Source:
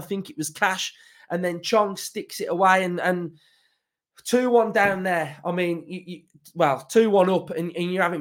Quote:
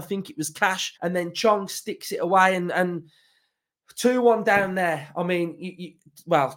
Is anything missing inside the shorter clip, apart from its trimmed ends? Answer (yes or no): yes